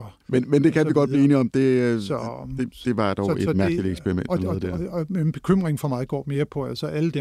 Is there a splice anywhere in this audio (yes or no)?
no